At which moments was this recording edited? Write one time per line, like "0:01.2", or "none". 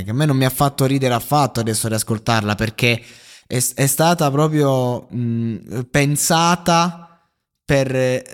none